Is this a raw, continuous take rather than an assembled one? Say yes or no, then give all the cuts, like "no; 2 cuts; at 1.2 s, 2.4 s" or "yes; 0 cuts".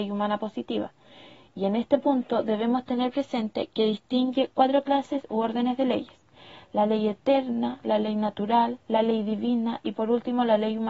yes; 0 cuts